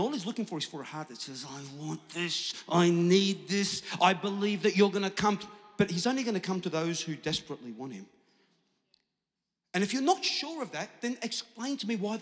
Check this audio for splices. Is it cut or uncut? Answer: uncut